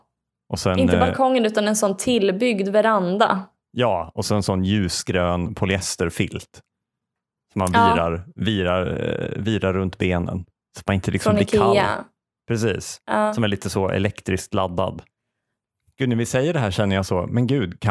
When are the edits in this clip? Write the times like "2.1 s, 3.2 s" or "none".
none